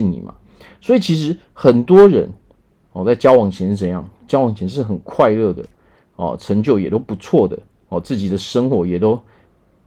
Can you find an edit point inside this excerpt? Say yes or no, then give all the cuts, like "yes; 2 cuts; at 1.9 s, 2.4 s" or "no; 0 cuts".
no; 0 cuts